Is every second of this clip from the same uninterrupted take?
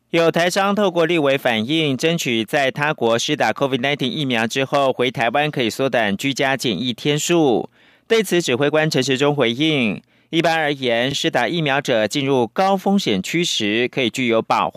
yes; 0 cuts

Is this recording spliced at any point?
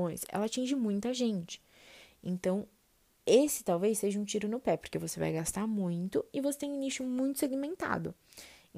no; 0 cuts

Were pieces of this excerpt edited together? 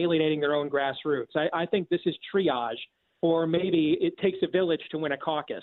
no; 0 cuts

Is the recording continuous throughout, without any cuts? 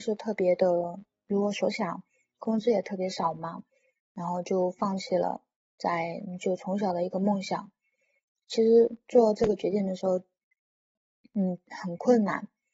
yes; 0 cuts

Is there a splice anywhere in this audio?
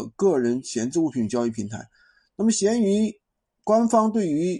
no; 0 cuts

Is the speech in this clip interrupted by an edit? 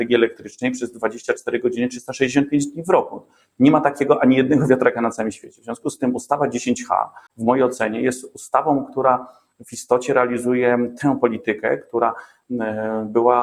yes; 1 cut; at 7.3 s

